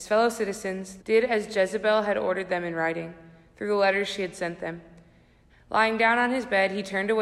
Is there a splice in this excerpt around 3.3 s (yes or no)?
no